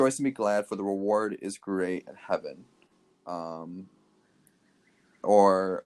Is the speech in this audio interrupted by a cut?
no; 0 cuts

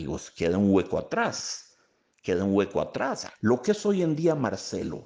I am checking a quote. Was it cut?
yes; 1 cut; at 3.3 s

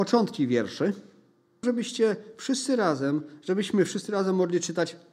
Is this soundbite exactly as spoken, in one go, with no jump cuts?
no; 1 cut; at 1.6 s

